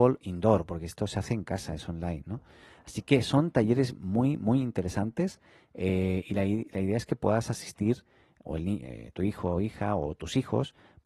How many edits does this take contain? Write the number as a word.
zero